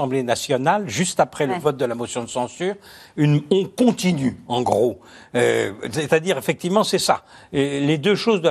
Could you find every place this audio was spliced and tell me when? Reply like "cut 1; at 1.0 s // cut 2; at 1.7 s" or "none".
none

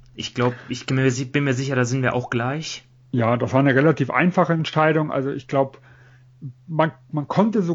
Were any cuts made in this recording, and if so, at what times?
none

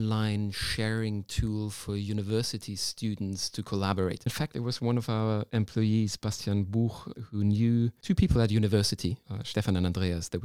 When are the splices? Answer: cut 1; at 4.3 s

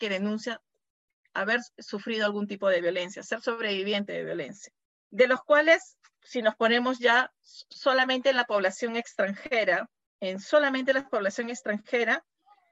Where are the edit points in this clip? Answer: none

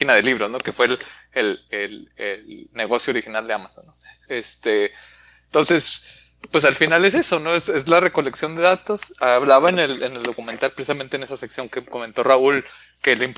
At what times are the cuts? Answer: cut 1; at 4.3 s

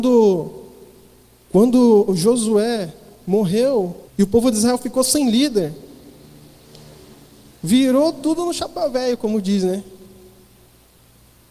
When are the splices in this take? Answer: cut 1; at 4.1 s

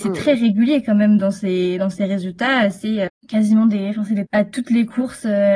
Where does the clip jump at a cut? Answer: cut 1; at 3.1 s // cut 2; at 4.2 s

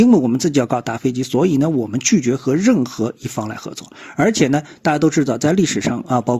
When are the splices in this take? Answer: none

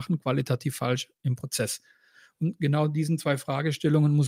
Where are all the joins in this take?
none

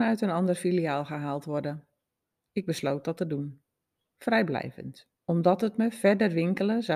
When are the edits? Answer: cut 1; at 5.2 s

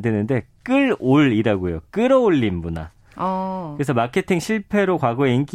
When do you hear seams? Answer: none

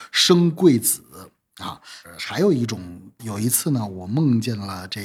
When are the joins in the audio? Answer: cut 1; at 3.2 s

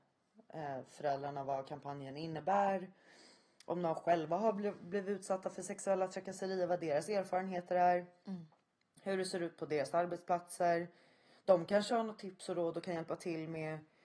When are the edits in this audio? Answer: none

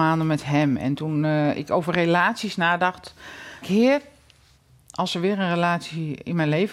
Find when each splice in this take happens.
cut 1; at 3.6 s

